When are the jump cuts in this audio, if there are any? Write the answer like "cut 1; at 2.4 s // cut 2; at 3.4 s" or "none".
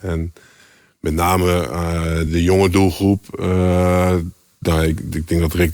cut 1; at 2.3 s